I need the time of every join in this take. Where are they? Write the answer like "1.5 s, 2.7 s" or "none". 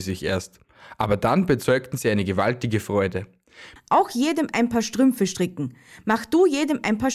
3.8 s